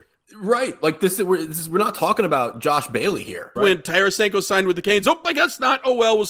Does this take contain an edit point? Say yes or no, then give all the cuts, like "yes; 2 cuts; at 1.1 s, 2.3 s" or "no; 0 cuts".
yes; 1 cut; at 3.6 s